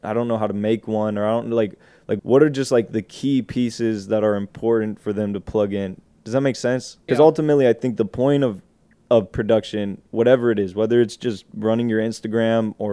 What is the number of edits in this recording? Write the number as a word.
two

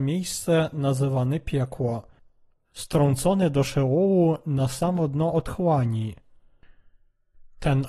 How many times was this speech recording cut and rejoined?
one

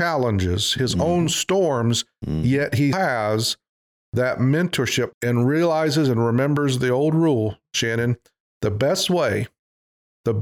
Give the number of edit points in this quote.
two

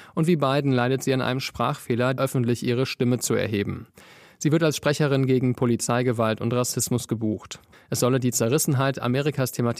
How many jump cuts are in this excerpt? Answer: two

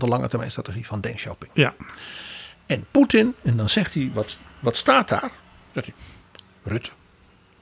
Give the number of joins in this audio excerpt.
zero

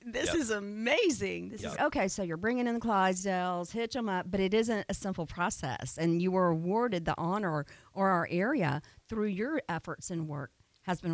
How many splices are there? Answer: one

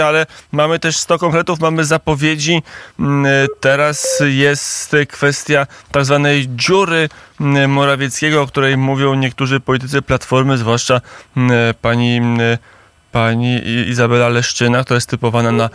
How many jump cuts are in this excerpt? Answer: zero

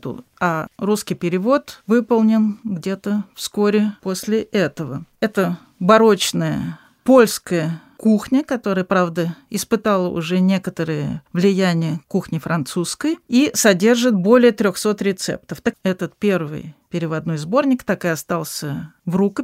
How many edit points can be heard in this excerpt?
one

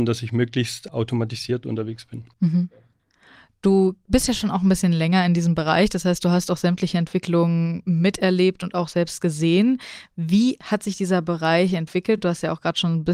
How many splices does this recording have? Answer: zero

